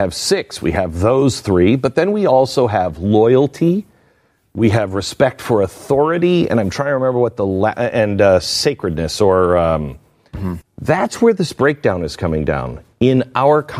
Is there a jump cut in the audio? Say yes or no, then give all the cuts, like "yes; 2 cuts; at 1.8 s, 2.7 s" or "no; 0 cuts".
yes; 1 cut; at 10.6 s